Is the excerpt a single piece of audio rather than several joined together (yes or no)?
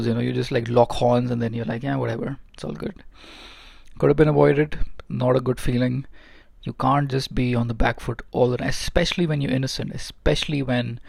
no